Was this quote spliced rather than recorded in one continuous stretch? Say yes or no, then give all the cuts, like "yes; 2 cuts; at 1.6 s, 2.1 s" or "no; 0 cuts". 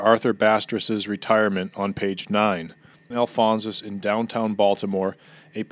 yes; 1 cut; at 3.1 s